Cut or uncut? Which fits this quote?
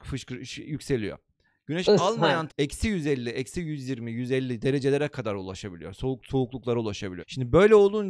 cut